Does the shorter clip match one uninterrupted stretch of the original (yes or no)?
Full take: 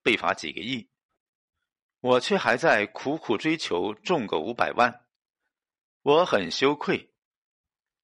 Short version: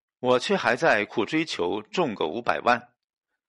no